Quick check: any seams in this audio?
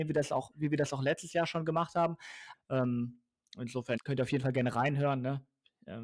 yes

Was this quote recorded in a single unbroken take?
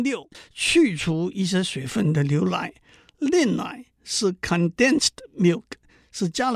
yes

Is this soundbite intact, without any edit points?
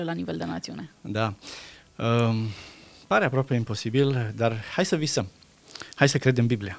yes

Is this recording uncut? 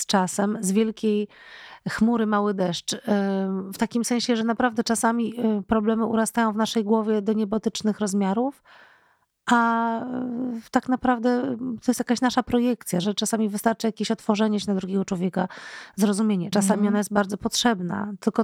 no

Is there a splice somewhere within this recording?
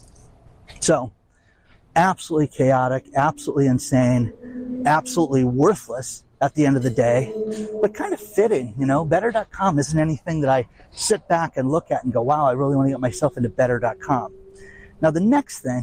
no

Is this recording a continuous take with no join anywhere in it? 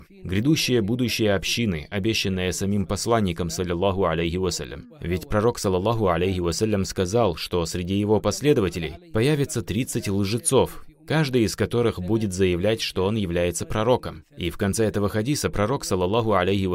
no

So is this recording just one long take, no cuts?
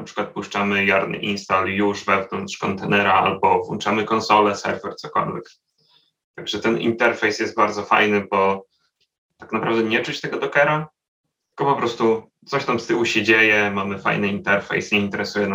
yes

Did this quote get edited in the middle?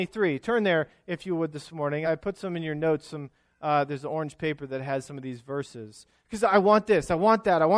yes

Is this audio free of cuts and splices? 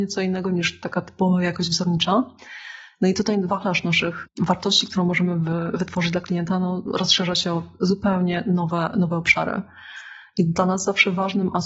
yes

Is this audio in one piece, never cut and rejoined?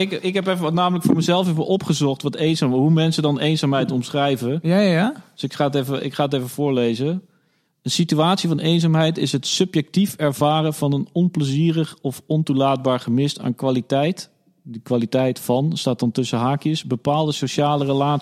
yes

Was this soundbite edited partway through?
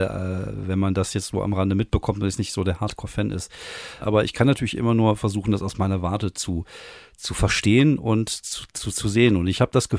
yes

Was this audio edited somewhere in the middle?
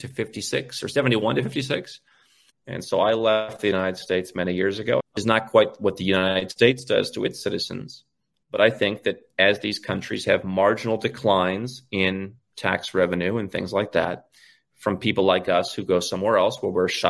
yes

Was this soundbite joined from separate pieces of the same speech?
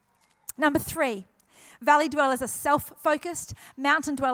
no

